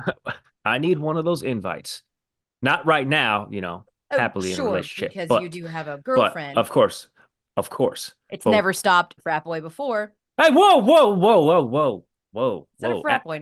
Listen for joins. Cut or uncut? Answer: cut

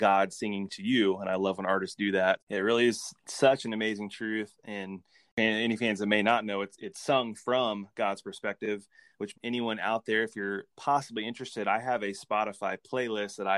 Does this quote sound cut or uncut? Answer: cut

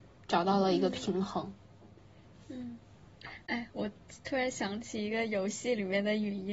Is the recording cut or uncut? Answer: uncut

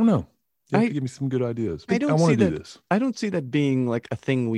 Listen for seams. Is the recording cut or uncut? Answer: cut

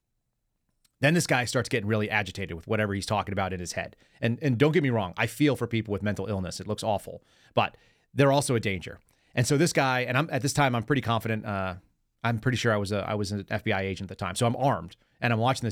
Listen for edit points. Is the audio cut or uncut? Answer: uncut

